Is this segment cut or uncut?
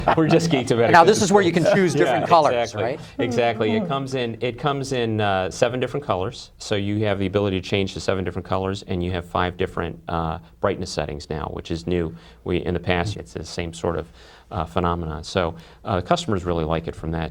cut